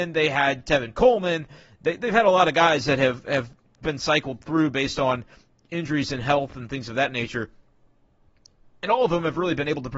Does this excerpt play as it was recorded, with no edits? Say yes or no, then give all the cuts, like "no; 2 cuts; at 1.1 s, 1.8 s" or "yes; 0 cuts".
yes; 0 cuts